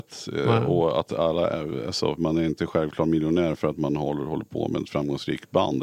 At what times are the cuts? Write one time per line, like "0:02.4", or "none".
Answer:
0:02.2